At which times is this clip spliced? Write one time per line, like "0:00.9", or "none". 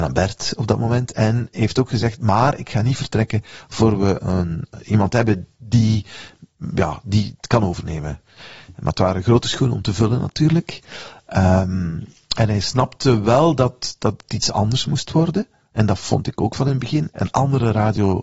none